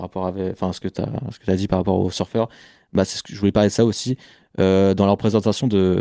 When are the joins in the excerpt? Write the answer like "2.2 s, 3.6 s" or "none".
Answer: none